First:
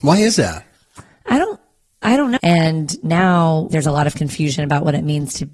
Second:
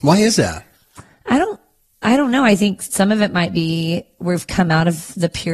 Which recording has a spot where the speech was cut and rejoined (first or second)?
first